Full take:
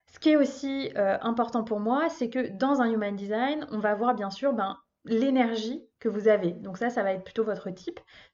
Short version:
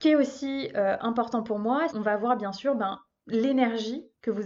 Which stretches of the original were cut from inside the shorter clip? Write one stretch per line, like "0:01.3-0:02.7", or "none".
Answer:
0:02.1-0:03.7